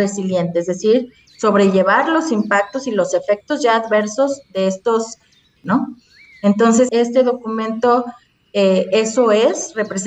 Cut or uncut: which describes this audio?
cut